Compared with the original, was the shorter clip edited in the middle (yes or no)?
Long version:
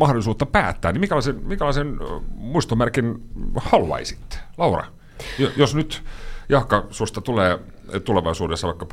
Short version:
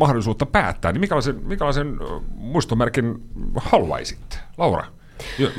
no